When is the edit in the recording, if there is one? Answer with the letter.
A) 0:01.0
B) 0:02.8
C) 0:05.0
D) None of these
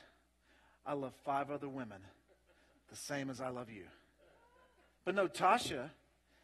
C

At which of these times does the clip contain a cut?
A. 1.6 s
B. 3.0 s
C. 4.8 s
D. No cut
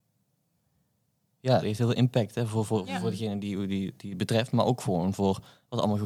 A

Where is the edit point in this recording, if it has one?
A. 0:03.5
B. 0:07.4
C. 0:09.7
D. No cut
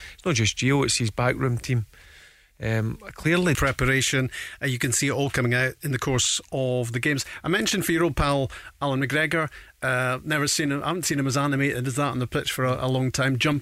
A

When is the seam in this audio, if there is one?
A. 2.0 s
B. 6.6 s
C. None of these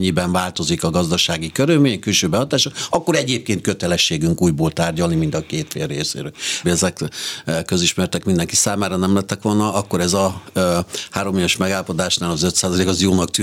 B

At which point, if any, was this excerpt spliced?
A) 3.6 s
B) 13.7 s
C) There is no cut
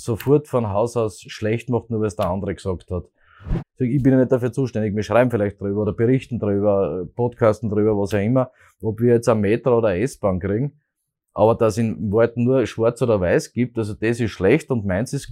A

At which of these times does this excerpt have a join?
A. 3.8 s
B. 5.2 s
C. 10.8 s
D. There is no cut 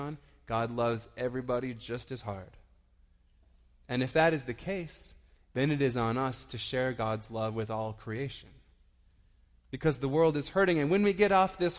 D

